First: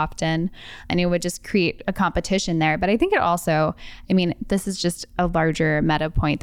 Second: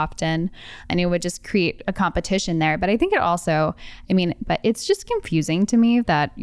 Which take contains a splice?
second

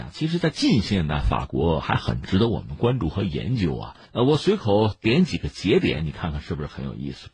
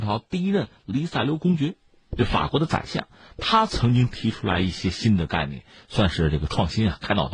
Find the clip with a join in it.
first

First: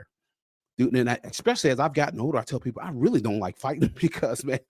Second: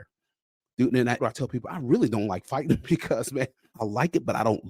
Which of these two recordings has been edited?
second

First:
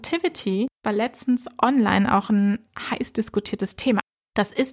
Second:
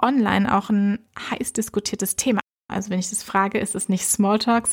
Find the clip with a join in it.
second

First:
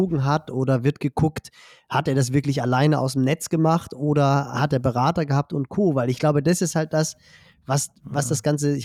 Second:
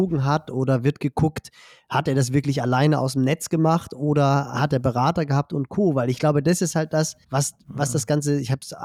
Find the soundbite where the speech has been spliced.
second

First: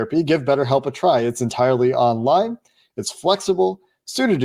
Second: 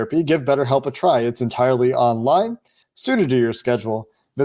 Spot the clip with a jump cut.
second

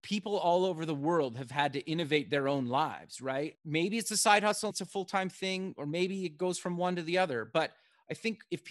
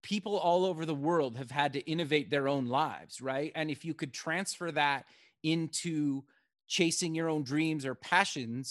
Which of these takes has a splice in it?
first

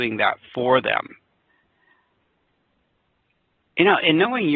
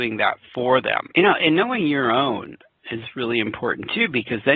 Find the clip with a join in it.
second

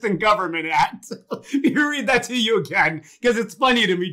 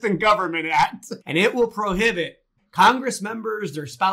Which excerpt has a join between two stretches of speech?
second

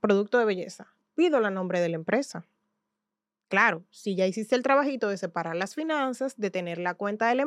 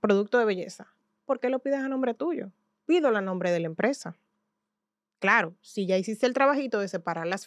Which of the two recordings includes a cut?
first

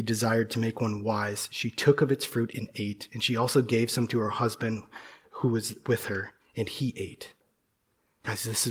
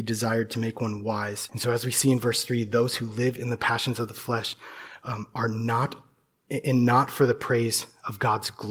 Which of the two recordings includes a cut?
second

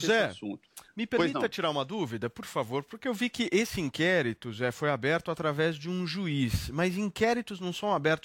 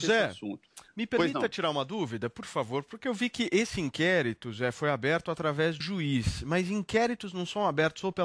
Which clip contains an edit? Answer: second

